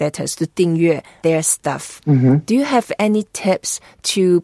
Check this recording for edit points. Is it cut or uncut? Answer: uncut